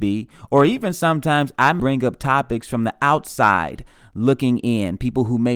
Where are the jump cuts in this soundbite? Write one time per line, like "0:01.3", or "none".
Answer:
0:01.8